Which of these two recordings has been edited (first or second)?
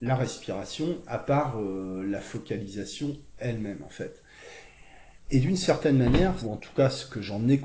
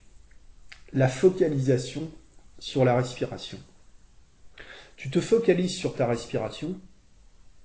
first